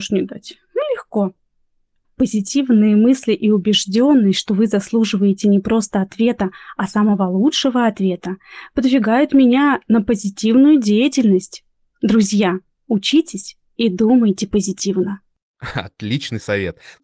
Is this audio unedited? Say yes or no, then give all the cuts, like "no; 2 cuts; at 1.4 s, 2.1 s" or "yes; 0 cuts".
yes; 0 cuts